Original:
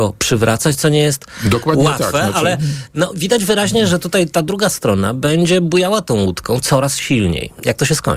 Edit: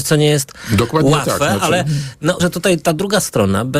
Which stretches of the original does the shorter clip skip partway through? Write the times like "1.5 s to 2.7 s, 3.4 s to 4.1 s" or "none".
3.1 s to 3.9 s